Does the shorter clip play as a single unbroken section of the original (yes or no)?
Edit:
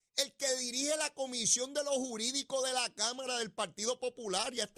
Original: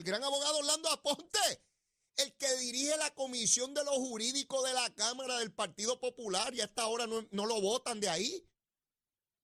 yes